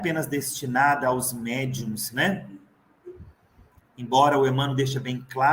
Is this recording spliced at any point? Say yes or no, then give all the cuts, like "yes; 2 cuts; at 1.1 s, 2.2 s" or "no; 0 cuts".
no; 0 cuts